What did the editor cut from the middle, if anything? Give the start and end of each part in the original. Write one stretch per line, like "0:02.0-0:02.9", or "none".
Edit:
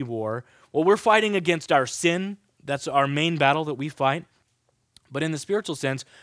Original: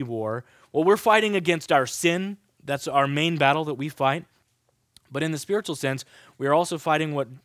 none